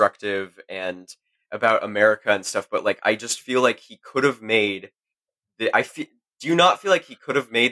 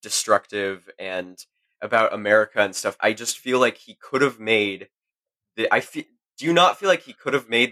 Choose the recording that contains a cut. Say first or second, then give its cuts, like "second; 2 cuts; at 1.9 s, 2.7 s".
second; 1 cut; at 3.0 s